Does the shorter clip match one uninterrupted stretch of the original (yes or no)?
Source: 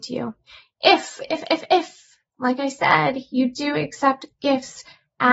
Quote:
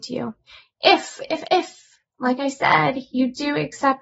no